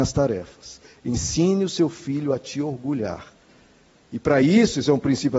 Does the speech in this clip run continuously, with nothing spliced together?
yes; 0 cuts

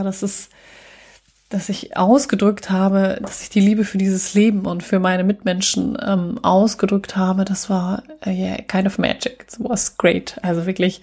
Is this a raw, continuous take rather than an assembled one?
yes; 0 cuts

